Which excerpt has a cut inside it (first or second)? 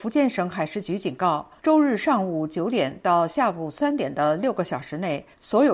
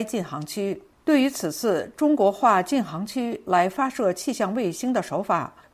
first